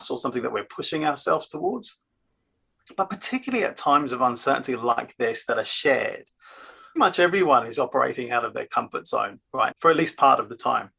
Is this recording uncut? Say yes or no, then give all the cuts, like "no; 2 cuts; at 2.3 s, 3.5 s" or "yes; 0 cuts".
no; 2 cuts; at 7.0 s, 9.7 s